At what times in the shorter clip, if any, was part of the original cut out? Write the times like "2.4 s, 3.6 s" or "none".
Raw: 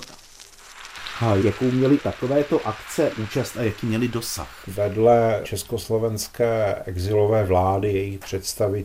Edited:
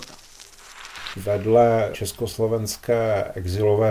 1.1 s